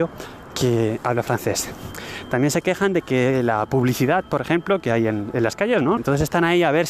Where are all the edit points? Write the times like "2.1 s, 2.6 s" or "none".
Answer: 6.0 s